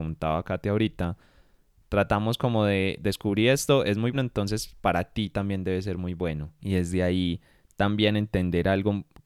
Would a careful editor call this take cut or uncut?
cut